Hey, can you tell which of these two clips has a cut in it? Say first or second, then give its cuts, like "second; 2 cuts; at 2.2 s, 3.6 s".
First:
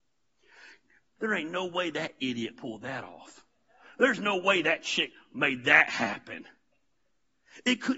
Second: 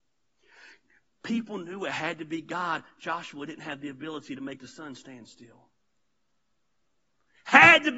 first; 1 cut; at 1.2 s